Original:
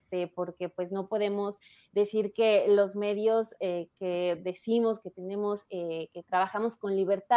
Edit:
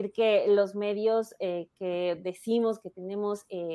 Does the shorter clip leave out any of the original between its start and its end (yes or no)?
no